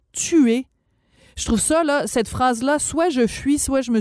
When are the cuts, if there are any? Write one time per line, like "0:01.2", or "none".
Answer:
none